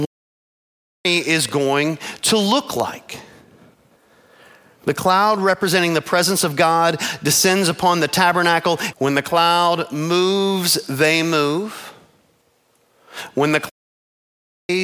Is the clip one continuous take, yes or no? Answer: no